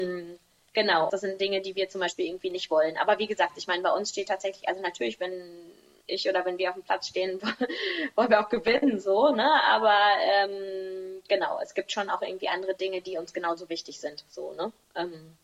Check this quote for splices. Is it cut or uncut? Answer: cut